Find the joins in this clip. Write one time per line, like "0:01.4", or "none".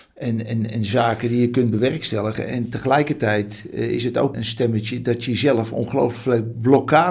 0:04.3